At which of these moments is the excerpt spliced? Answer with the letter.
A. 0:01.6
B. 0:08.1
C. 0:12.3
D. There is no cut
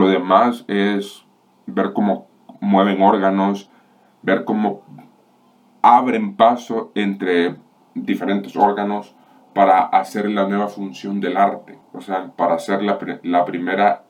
C